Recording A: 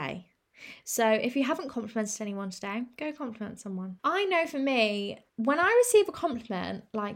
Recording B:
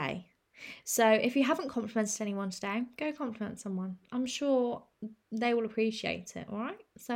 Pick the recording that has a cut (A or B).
A